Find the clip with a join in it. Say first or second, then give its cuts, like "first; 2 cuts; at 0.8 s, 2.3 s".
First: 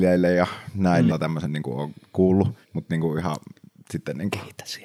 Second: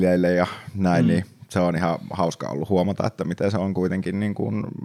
first; 2 cuts; at 1.1 s, 2.6 s